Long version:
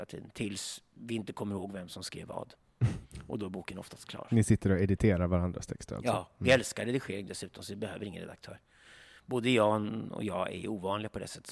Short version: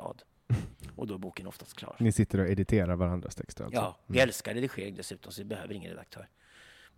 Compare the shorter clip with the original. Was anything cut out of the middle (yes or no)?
no